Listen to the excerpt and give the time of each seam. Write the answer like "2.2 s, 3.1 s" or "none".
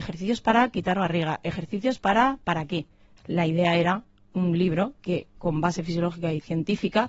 3.2 s